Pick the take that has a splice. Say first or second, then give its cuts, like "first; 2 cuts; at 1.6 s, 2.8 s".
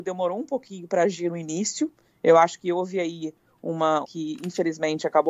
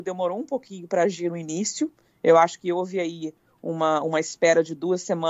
first; 1 cut; at 4.0 s